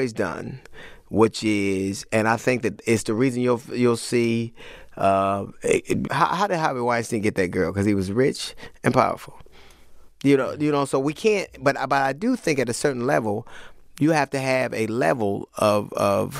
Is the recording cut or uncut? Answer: cut